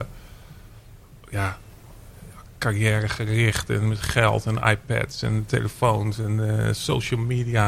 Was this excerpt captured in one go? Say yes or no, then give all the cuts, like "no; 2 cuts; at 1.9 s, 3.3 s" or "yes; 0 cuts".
yes; 0 cuts